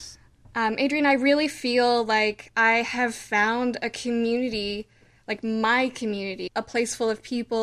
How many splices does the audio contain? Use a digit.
1